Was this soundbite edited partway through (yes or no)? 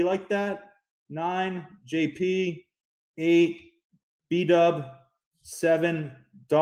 no